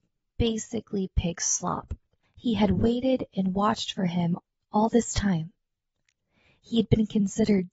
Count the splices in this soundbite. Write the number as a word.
one